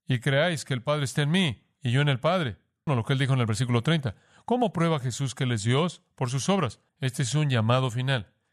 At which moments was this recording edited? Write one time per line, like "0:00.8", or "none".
0:02.9
0:06.9